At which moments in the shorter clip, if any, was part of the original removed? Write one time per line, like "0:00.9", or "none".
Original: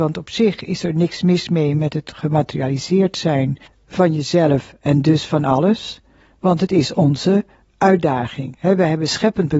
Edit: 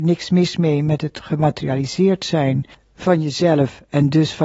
none